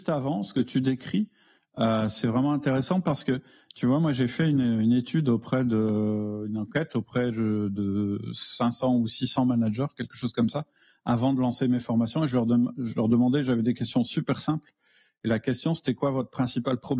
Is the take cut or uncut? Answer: uncut